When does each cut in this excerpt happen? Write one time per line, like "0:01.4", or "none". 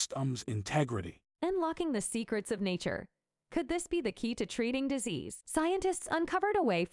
0:01.3
0:05.4